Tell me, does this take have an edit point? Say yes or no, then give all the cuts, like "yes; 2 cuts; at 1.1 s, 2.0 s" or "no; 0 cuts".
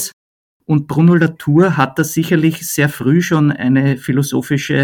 no; 0 cuts